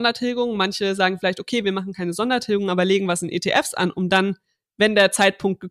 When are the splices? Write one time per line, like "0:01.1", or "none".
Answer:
none